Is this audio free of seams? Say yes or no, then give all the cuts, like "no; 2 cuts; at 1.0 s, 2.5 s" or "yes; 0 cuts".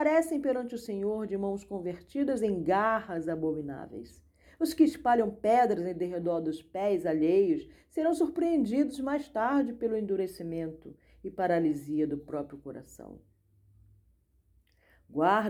yes; 0 cuts